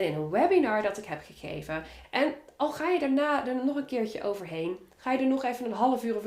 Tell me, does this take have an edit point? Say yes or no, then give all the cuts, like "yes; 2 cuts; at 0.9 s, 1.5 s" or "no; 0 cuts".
yes; 1 cut; at 2.0 s